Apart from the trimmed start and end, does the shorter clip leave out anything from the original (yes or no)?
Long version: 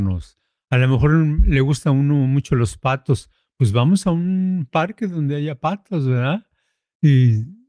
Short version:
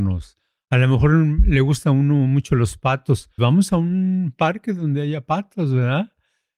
yes